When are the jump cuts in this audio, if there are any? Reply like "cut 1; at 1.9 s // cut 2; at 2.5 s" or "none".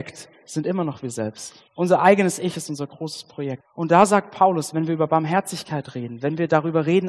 cut 1; at 1.7 s // cut 2; at 3.6 s